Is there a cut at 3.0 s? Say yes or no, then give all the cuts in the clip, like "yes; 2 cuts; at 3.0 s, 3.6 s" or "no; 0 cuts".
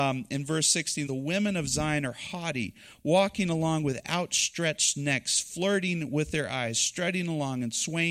no; 1 cut; at 1.1 s